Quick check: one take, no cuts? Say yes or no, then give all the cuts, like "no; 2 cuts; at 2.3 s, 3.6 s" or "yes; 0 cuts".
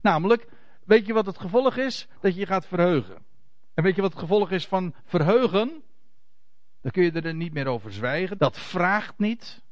no; 2 cuts; at 6.8 s, 8.4 s